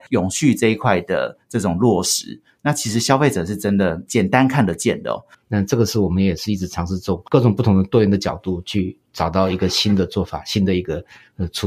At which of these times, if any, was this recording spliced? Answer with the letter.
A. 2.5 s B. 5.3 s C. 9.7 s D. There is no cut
B